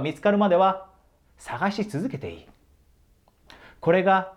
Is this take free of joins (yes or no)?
yes